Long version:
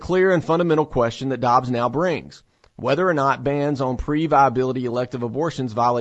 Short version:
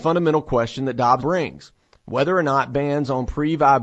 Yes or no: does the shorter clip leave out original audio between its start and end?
yes